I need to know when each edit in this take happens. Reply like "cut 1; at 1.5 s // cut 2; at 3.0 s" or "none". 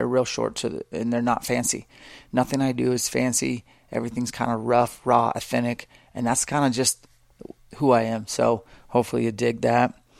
none